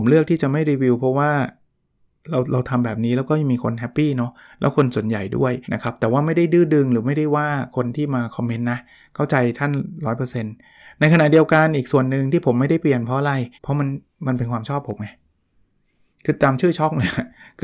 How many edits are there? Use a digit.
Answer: 2